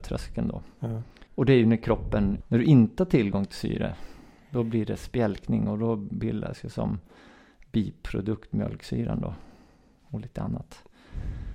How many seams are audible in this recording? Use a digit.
1